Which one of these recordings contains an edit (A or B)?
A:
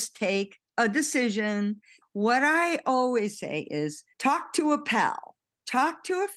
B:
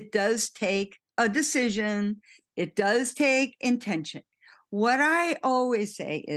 A